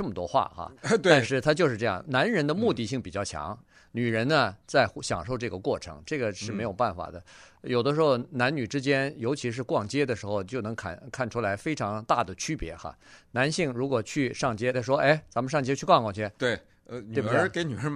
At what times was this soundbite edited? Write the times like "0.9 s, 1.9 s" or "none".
14.7 s, 16.4 s